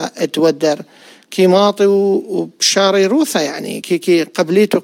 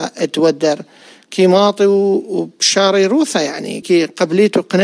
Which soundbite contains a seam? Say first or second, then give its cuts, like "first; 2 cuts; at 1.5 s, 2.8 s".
second; 1 cut; at 3.8 s